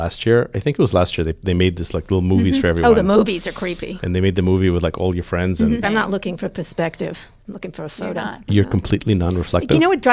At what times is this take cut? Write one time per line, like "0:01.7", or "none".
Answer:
0:05.8